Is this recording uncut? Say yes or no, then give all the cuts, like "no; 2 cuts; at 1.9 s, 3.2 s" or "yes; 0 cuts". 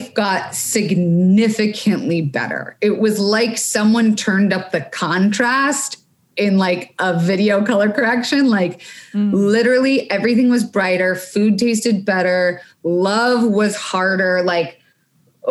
yes; 0 cuts